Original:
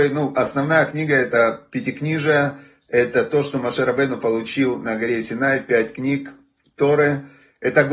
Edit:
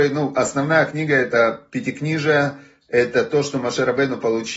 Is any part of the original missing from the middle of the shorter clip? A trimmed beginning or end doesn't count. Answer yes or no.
no